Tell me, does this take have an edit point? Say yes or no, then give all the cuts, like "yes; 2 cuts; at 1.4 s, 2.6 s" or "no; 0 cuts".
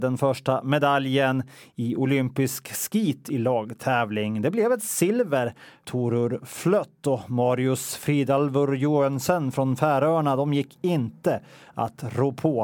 no; 0 cuts